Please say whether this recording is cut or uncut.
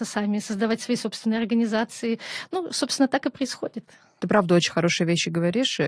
uncut